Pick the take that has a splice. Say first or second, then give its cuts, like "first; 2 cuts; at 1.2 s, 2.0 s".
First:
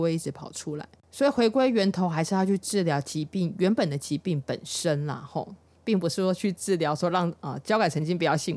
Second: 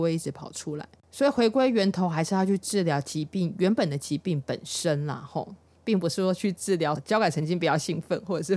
second; 1 cut; at 7.0 s